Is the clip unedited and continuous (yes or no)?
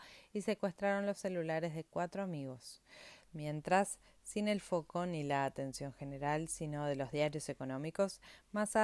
no